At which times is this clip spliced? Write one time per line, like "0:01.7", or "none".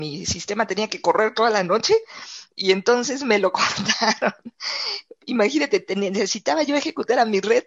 none